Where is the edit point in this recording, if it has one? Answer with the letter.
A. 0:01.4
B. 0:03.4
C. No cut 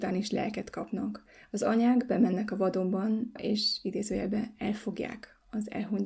B